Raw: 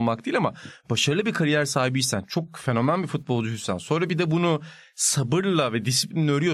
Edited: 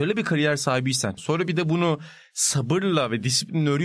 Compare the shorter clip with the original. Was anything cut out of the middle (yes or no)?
yes